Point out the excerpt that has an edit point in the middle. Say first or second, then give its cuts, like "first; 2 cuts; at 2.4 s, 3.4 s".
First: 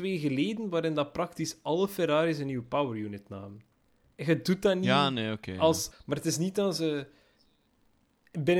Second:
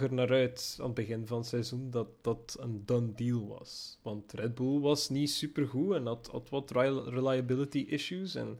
first; 2 cuts; at 4.1 s, 5.9 s